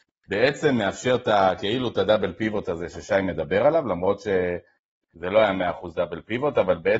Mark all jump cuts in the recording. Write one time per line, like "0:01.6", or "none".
none